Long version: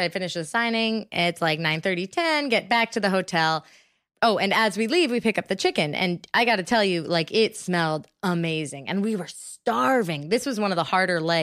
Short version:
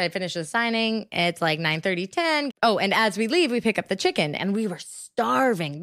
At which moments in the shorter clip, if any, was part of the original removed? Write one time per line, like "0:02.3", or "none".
0:02.5
0:04.4